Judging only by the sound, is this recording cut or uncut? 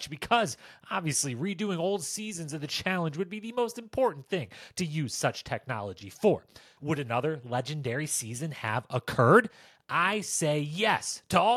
cut